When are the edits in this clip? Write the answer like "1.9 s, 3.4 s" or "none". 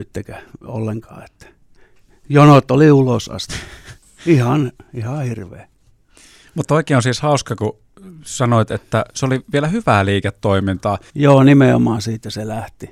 11.1 s